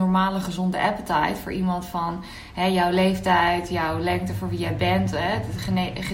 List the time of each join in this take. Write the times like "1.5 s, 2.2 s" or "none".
none